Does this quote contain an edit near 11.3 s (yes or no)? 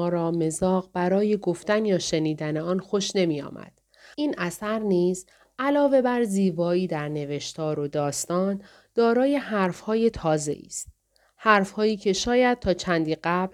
no